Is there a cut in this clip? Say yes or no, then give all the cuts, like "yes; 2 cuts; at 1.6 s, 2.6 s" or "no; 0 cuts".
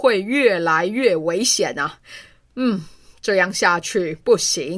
no; 0 cuts